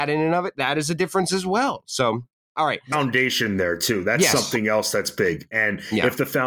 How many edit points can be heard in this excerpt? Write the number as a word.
one